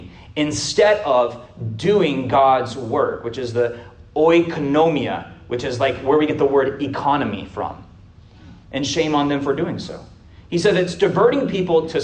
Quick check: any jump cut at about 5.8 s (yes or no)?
no